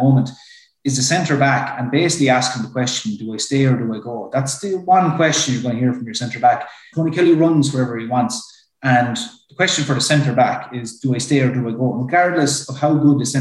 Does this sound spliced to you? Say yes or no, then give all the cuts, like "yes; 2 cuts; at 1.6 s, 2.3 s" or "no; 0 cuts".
yes; 1 cut; at 6.9 s